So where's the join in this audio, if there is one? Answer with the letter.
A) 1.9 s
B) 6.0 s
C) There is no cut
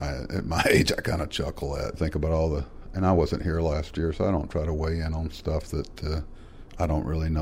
A